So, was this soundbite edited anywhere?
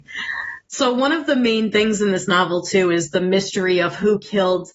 no; 0 cuts

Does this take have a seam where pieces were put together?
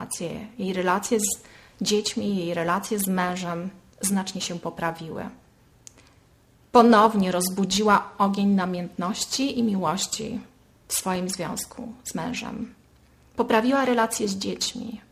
no; 0 cuts

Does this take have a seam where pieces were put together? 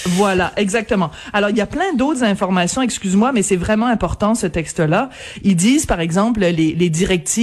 no; 0 cuts

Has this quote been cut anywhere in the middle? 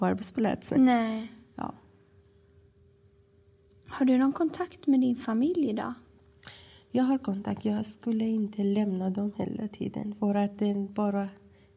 no; 0 cuts

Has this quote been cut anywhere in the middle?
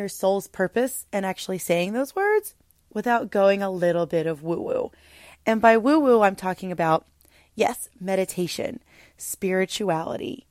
no; 0 cuts

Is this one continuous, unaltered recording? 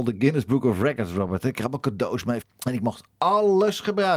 no; 1 cut; at 2.4 s

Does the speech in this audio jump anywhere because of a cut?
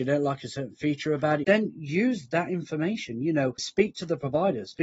yes; 2 cuts; at 1.4 s, 3.6 s

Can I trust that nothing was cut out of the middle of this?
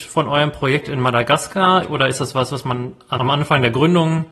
no; 2 cuts; at 1.8 s, 3.2 s

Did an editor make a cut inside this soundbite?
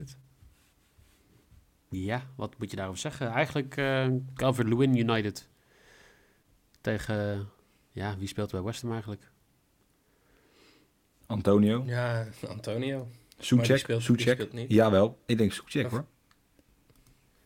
no; 0 cuts

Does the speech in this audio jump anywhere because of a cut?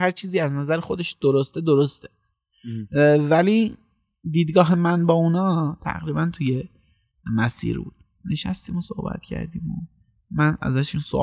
no; 0 cuts

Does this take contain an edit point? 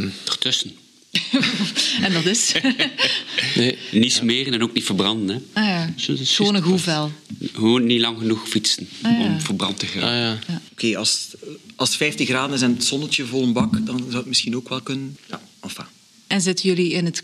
yes; 2 cuts; at 10.7 s, 15.2 s

